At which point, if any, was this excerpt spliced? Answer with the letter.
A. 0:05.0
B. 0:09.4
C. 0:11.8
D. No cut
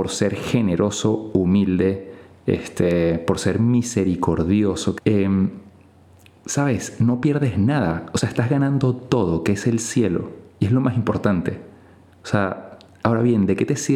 A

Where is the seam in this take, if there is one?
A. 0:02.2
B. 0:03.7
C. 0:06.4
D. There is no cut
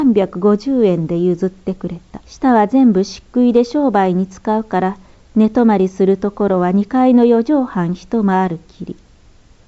A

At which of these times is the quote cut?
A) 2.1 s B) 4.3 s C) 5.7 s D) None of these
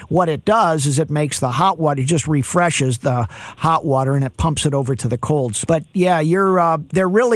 C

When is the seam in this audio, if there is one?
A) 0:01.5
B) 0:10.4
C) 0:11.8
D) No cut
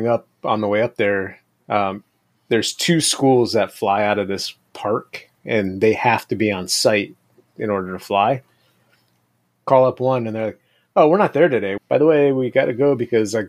C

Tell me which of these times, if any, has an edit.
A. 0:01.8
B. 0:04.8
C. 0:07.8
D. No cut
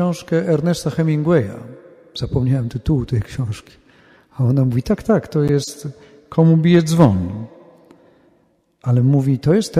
D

